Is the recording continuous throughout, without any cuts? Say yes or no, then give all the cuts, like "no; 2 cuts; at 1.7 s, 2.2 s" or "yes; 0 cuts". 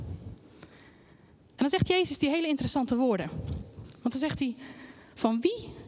yes; 0 cuts